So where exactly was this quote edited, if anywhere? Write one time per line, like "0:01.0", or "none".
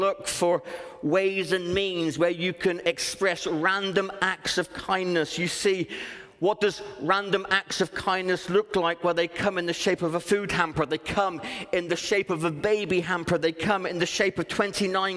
none